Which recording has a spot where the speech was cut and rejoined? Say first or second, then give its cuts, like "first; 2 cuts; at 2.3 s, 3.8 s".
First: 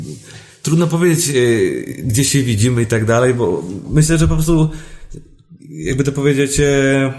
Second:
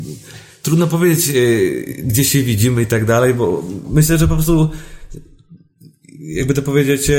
first; 1 cut; at 5.6 s